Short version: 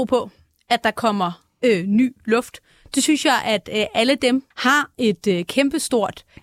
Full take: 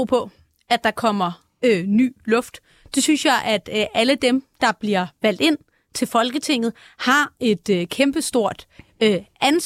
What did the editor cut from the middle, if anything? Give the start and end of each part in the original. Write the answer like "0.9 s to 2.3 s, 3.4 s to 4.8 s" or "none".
4.5 s to 6.9 s